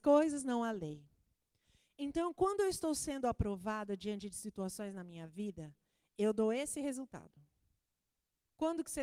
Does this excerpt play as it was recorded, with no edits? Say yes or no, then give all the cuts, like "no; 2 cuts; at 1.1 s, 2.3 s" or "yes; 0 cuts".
yes; 0 cuts